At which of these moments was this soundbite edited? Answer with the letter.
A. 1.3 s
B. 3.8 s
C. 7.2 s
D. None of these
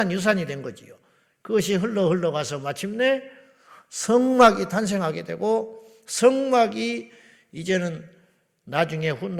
D